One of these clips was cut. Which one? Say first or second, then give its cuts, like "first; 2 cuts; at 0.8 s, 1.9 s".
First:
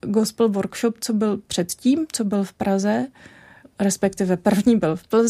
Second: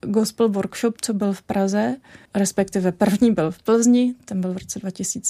second; 2 cuts; at 1.0 s, 2.3 s